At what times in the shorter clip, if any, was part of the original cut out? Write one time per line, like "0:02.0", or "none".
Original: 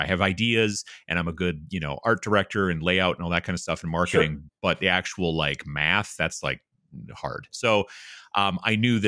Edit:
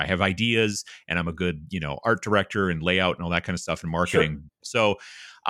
0:04.6

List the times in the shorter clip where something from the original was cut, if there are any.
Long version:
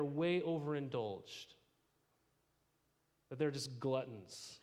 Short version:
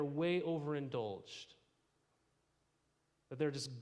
none

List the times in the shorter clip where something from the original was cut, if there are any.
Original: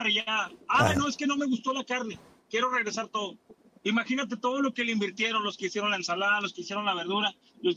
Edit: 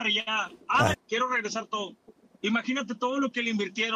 0:00.9

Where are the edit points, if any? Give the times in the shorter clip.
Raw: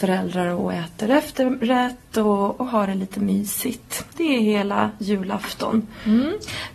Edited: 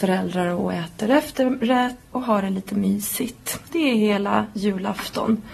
0:02.1

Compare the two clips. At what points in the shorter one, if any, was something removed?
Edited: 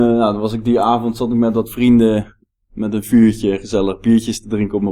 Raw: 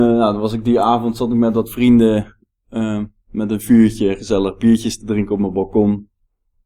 0:02.6

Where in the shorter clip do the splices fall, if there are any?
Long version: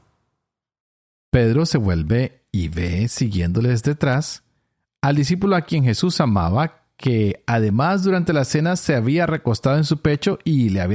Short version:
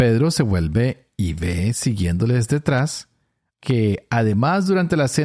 0:03.6

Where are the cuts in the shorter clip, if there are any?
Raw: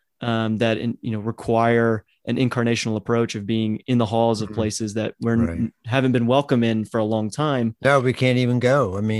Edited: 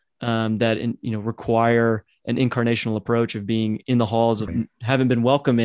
0:04.5

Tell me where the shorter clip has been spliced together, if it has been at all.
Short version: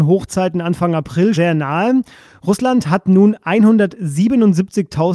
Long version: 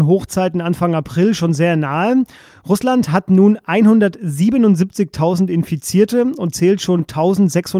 0:01.3

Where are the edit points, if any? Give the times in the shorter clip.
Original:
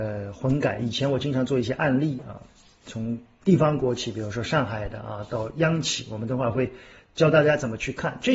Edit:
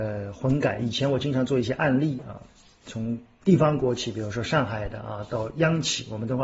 none

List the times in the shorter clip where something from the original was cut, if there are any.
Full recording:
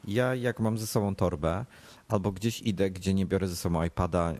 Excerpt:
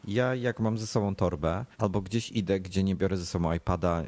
0:01.7

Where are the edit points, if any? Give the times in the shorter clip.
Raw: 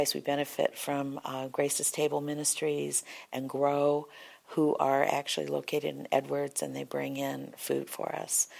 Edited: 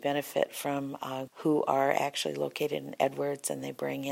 0:01.3

